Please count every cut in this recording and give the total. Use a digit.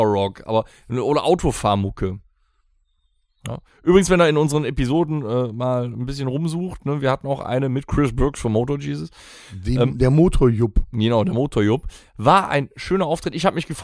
0